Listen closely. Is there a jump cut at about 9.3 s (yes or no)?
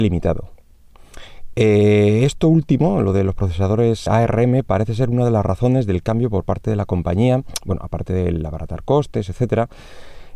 no